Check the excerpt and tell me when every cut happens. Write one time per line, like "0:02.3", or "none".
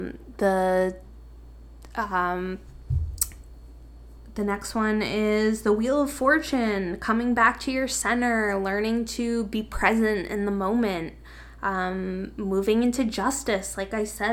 none